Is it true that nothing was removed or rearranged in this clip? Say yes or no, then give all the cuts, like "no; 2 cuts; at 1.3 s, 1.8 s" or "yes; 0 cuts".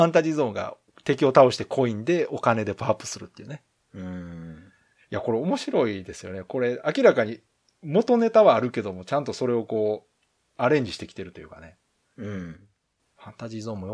yes; 0 cuts